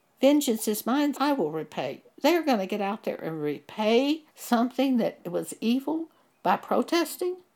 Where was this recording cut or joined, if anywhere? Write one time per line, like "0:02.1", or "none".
0:01.1
0:04.3